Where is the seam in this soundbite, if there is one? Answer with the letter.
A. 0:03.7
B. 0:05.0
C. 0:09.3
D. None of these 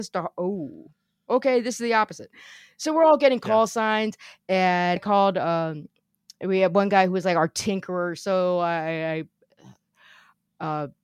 B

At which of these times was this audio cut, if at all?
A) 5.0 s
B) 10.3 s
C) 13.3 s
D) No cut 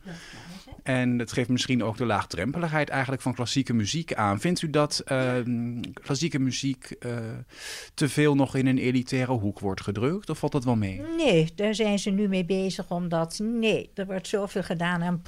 D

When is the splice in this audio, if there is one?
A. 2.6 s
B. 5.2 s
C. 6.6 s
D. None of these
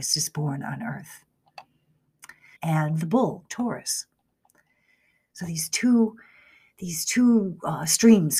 A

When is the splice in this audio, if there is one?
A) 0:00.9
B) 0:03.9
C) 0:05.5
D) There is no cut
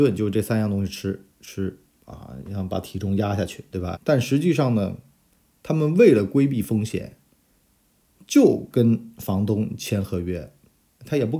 B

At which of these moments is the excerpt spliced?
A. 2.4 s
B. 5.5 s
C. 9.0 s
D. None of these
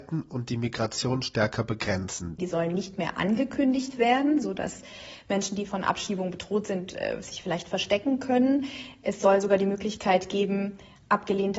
A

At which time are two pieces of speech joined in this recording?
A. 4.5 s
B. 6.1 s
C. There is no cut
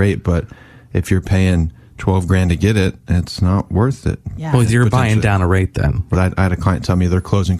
B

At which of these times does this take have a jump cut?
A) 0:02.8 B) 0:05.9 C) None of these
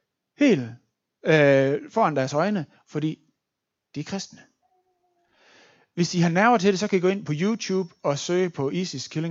A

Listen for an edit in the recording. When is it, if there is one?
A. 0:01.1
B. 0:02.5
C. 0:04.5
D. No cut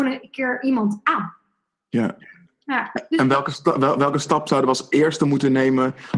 B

